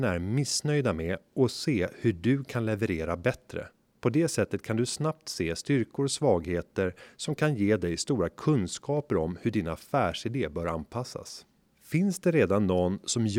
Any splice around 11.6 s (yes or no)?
no